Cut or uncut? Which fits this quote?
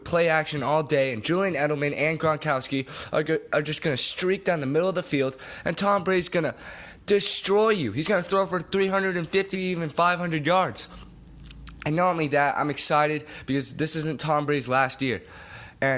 cut